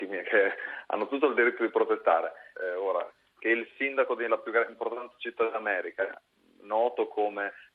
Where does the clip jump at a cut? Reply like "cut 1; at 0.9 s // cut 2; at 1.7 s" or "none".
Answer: cut 1; at 2.5 s